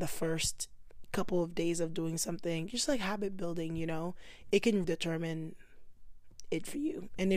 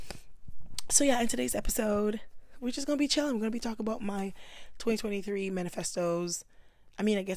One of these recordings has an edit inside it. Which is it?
first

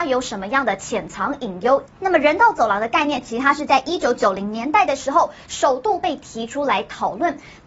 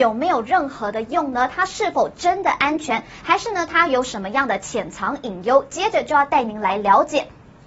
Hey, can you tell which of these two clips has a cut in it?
first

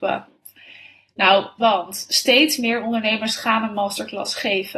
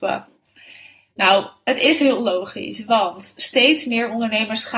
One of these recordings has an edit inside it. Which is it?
first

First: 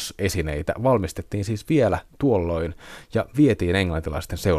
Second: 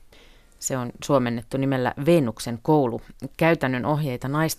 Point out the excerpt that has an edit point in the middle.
first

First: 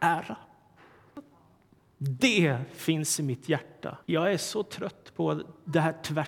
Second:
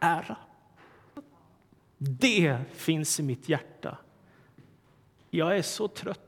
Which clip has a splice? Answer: first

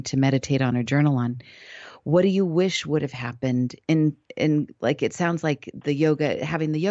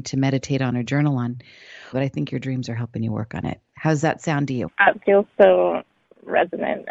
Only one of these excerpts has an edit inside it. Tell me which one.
second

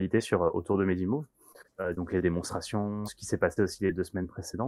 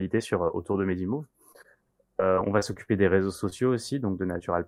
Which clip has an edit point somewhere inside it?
first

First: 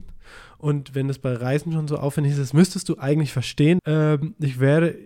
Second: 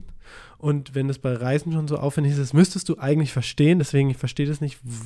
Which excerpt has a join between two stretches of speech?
first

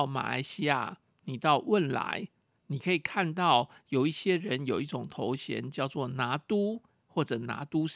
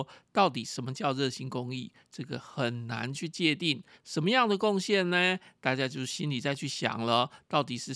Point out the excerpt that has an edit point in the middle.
second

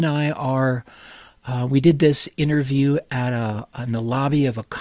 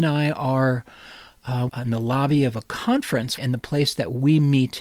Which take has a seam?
second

